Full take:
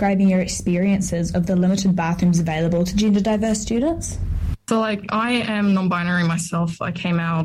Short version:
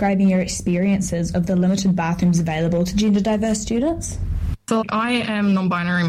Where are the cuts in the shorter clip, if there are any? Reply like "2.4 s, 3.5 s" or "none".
4.8 s